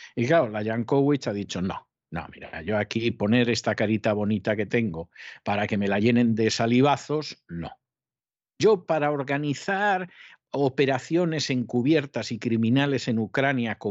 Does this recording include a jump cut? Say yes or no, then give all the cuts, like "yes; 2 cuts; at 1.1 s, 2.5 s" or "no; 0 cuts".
no; 0 cuts